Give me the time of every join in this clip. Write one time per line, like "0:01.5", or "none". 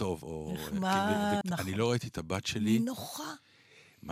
0:01.4